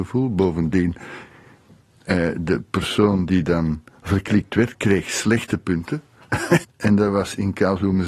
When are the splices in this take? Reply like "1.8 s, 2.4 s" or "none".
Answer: 4.7 s, 6.6 s